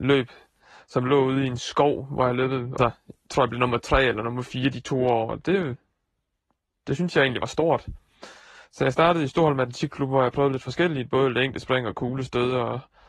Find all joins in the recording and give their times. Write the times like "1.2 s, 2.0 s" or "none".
2.8 s